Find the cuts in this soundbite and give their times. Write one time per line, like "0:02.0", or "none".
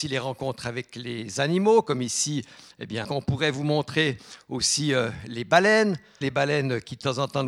0:03.0
0:06.2